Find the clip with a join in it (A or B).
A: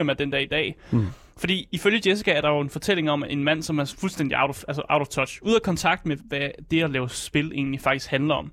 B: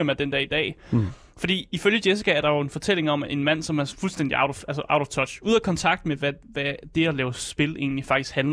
A